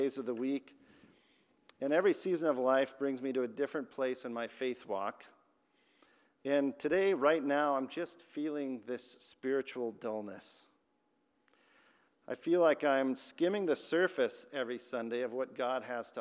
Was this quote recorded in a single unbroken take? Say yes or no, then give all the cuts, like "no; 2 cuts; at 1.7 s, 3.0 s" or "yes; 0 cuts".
yes; 0 cuts